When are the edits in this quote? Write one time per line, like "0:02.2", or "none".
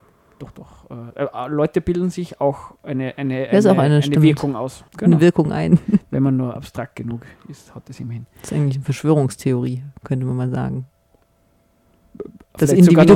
0:04.9

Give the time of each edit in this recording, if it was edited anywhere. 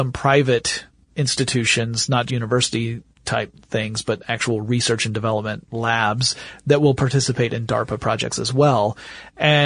0:02.3

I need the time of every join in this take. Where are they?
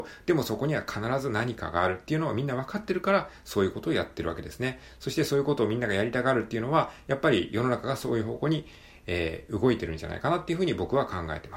none

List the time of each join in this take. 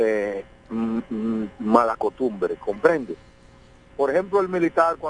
0:03.9

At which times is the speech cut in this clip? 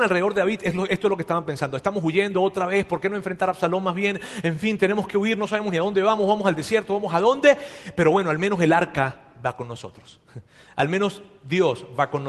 none

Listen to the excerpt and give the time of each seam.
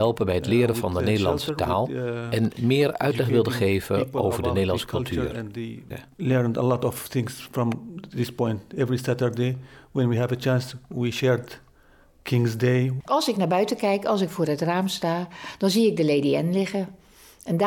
0:05.9
0:13.0

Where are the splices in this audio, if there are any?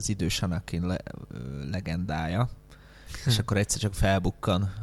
none

